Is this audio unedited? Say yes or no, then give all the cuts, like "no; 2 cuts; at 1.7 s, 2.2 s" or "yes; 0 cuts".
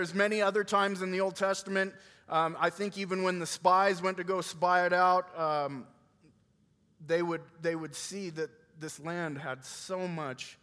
yes; 0 cuts